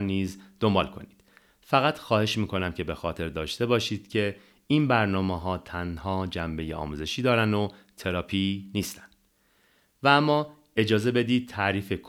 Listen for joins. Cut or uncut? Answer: uncut